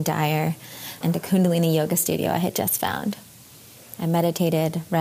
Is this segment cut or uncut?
cut